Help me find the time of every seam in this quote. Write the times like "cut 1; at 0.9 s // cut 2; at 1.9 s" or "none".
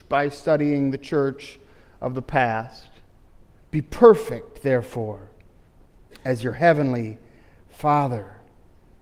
cut 1; at 3.6 s